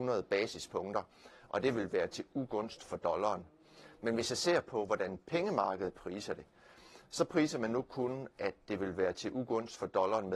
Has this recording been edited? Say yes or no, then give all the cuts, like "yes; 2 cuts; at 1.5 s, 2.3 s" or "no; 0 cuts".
no; 0 cuts